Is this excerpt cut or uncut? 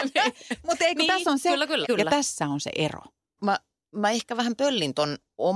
cut